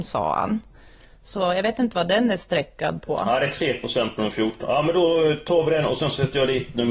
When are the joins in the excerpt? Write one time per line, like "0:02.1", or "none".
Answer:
none